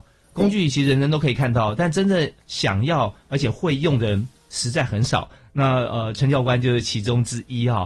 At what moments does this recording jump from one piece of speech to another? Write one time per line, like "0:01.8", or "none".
none